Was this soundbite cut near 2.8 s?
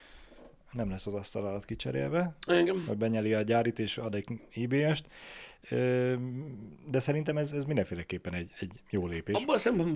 no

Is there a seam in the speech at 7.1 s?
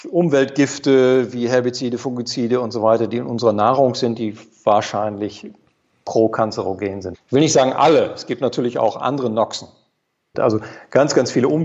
yes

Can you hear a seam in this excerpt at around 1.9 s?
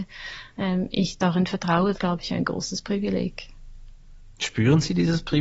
yes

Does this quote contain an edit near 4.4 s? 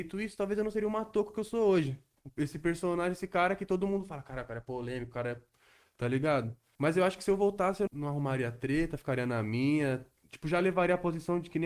no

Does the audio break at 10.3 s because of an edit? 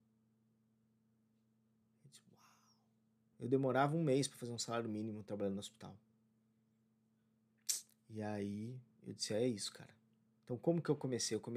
no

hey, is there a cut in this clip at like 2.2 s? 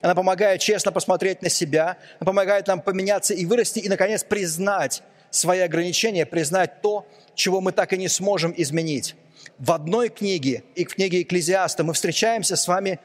no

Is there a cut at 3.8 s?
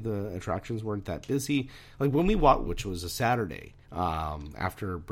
yes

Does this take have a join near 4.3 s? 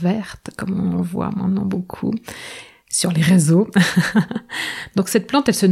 no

